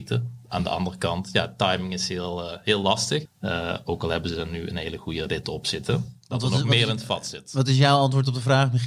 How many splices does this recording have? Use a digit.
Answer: 1